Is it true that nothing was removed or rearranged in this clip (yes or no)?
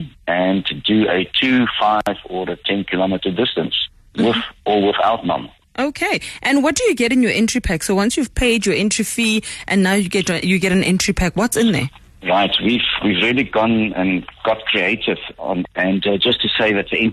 no